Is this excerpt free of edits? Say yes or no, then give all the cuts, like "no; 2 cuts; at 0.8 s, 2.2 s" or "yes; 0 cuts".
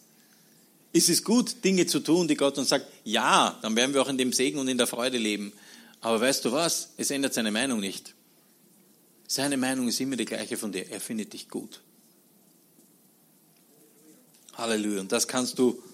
yes; 0 cuts